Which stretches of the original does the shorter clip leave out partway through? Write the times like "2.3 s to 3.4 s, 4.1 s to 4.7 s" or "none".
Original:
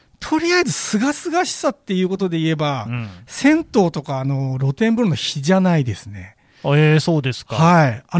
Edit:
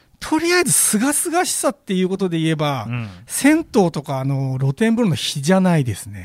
none